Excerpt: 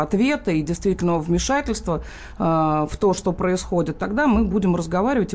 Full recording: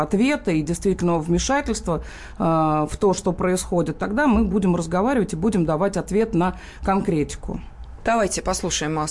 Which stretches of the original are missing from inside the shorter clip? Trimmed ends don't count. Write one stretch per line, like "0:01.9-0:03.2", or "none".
none